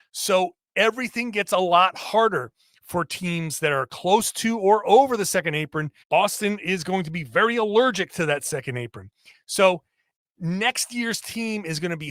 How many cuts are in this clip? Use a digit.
1